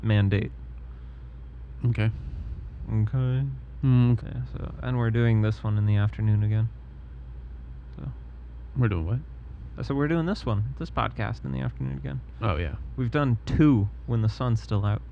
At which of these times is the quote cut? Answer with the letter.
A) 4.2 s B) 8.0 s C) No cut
A